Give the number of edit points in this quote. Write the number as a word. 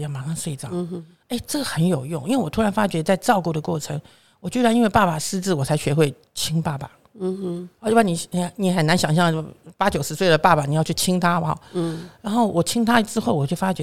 zero